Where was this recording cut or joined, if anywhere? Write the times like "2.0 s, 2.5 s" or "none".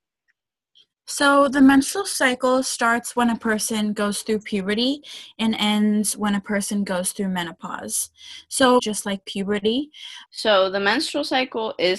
8.8 s, 10.3 s